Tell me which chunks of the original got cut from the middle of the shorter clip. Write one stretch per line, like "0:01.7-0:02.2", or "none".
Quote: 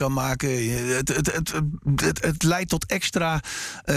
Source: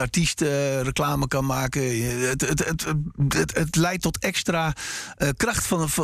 none